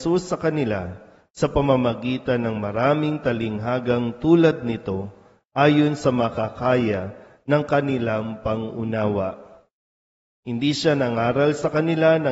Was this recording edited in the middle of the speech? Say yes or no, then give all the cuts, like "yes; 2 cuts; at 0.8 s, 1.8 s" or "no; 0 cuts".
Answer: no; 0 cuts